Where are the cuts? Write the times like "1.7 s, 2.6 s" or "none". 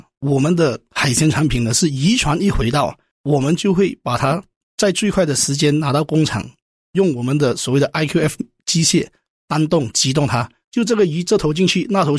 none